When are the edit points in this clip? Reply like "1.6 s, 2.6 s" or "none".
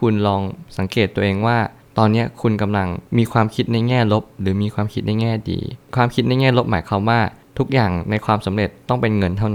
3.1 s